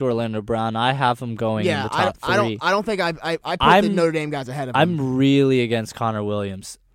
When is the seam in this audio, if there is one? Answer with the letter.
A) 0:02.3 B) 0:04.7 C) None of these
C